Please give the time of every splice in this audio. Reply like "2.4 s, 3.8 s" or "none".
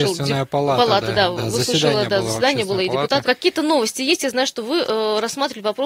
3.2 s